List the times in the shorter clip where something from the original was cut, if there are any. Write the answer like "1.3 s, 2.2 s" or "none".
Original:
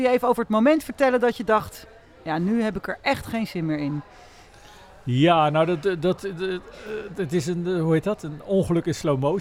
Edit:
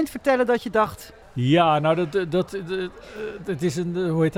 1.2 s